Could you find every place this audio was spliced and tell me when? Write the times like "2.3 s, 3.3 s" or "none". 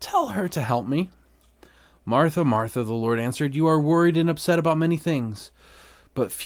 none